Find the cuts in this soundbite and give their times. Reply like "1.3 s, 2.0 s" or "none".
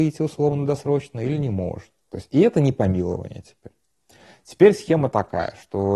2.1 s